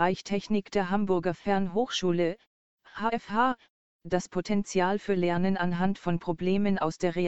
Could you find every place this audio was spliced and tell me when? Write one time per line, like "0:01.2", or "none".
none